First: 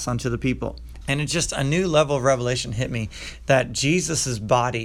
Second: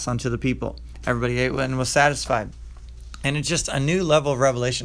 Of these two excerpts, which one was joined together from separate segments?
first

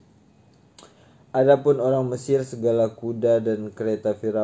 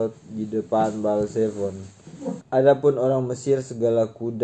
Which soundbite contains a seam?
second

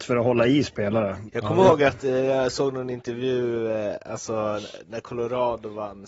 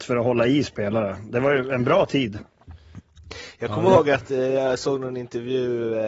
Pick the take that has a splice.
first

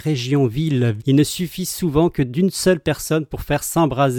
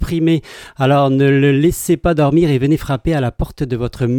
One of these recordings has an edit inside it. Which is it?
first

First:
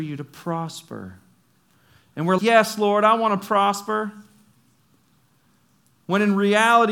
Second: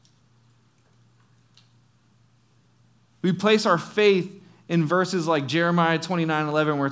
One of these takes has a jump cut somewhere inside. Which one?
first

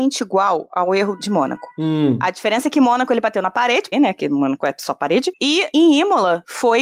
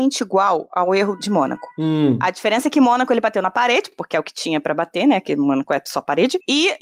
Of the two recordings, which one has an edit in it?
first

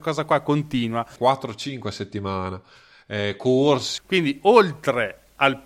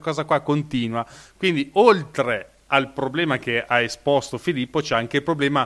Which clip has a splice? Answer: first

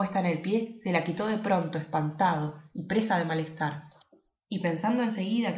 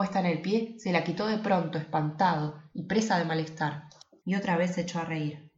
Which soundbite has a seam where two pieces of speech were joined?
second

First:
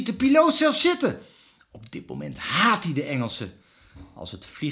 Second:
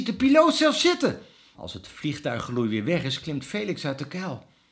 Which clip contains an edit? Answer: second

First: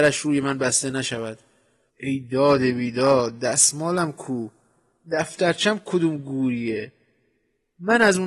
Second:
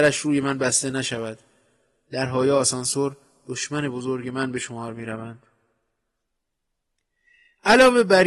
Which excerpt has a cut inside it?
first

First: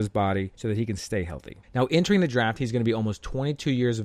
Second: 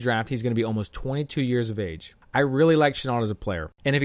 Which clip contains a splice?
first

